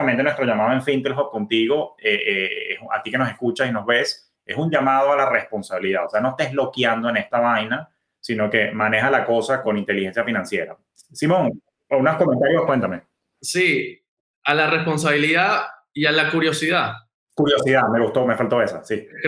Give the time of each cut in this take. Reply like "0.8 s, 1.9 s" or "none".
9.6 s, 12.7 s